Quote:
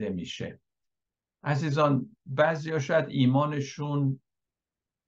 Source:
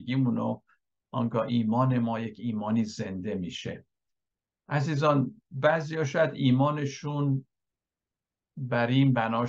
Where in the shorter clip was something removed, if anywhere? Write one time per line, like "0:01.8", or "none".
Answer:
none